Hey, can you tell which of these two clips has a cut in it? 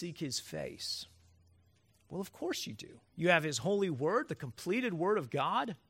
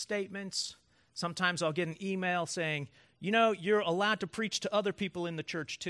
first; 1 cut; at 3.1 s

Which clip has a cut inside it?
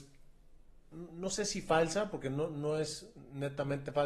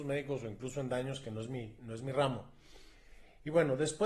first; 1 cut; at 0.9 s

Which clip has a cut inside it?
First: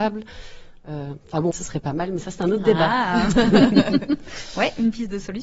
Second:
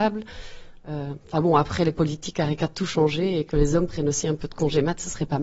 first; 1 cut; at 1.5 s

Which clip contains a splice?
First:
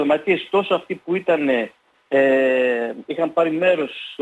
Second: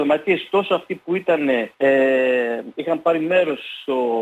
second; 1 cut; at 1.7 s

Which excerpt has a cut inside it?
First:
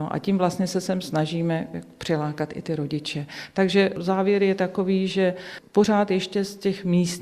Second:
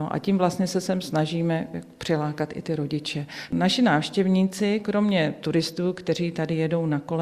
second; 1 cut; at 3.5 s

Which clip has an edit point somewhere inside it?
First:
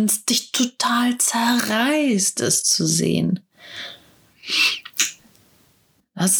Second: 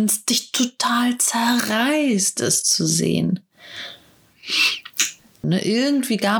second; 1 cut; at 5.4 s

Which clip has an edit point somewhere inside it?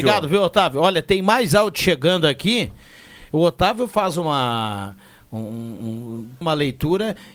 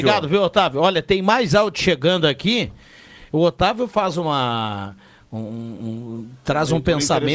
first; 1 cut; at 6.4 s

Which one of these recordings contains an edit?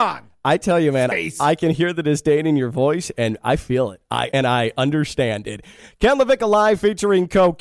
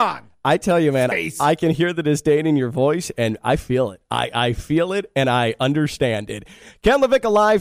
first; 1 cut; at 4.3 s

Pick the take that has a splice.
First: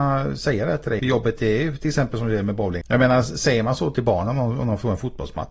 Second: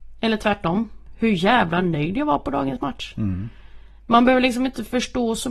first; 2 cuts; at 1.0 s, 2.8 s

